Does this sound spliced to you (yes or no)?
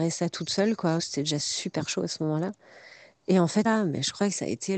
yes